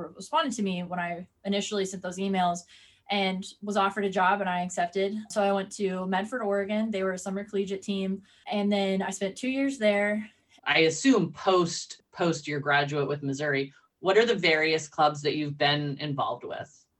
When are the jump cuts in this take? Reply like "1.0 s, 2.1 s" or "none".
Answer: 10.6 s